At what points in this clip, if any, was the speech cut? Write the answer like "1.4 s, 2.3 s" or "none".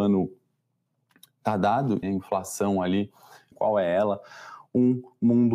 2.0 s, 3.5 s